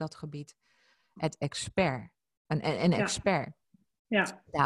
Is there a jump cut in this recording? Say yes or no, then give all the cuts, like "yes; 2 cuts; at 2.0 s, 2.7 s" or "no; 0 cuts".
no; 0 cuts